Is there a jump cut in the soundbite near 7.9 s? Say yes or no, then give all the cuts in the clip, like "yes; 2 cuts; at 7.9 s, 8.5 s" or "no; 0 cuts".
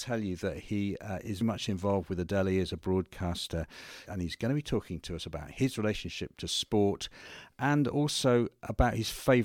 no; 2 cuts; at 1.4 s, 4.1 s